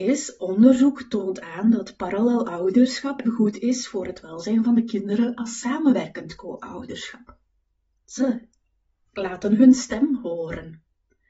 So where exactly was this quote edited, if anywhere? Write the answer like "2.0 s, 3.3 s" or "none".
3.3 s, 8.0 s